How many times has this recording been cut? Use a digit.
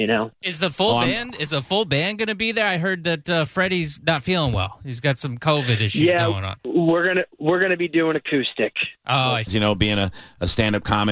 1